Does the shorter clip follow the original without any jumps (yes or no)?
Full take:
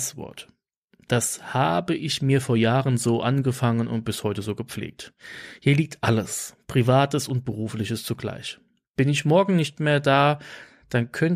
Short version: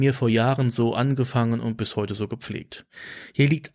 yes